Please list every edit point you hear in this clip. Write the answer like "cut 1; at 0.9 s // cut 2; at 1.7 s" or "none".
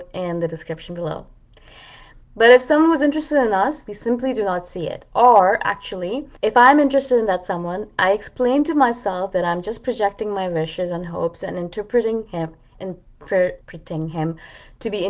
cut 1; at 2.3 s // cut 2; at 6.4 s // cut 3; at 13.6 s